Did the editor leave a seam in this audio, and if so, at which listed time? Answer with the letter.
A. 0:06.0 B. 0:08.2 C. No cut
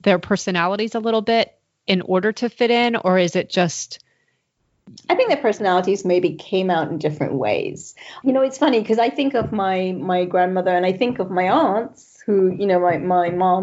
C